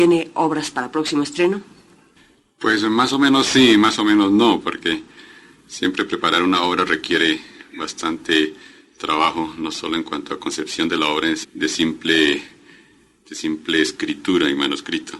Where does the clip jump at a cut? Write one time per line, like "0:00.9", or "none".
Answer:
0:11.4